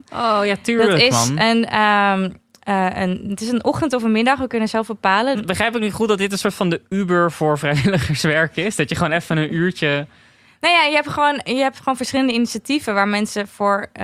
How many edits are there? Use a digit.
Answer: 1